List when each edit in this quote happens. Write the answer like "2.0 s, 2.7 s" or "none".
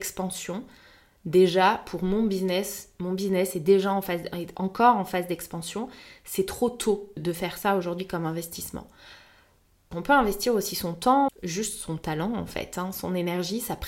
7.2 s, 9.9 s, 11.3 s